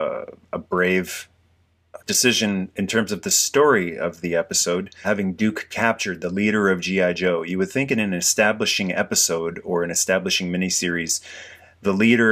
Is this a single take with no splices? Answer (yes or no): no